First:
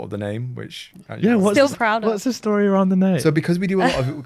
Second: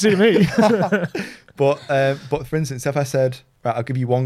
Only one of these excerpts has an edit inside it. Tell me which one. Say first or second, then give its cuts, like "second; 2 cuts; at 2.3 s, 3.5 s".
first; 1 cut; at 1.7 s